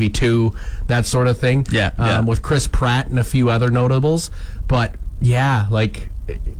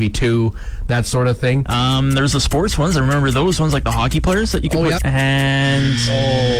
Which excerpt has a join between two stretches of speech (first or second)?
second